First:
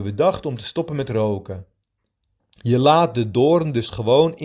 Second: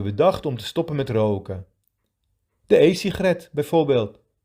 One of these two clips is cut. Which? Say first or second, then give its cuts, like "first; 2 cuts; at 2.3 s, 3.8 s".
first; 1 cut; at 2.4 s